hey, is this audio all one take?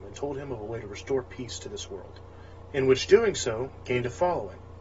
yes; 0 cuts

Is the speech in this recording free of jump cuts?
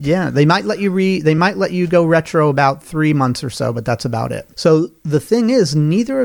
no; 1 cut; at 4.5 s

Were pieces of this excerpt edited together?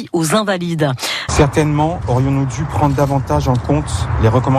yes; 1 cut; at 1.3 s

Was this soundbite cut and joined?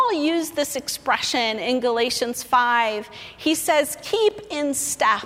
no; 0 cuts

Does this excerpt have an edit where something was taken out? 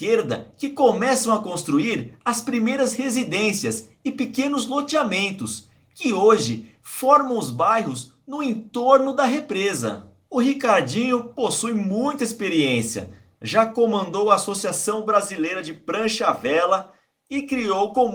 yes; 1 cut; at 10.2 s

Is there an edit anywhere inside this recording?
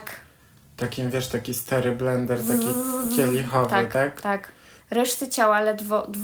yes; 1 cut; at 4.8 s

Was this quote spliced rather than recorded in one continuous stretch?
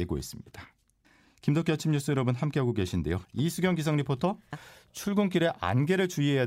yes; 2 cuts; at 3.2 s, 4.5 s

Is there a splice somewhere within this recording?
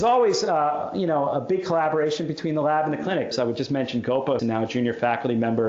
yes; 2 cuts; at 3.3 s, 4.4 s

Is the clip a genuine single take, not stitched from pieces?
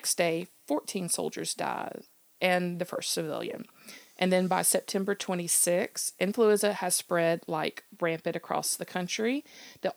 yes; 0 cuts

